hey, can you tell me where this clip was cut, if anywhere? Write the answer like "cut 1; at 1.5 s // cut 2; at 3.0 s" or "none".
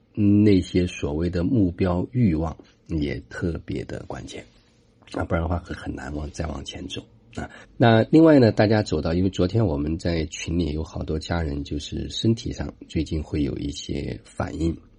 cut 1; at 5.7 s // cut 2; at 7.6 s